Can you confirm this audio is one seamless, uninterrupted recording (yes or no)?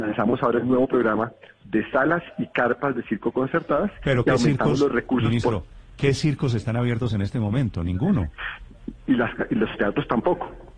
yes